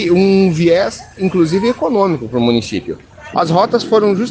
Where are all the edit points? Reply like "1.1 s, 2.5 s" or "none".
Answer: 3.3 s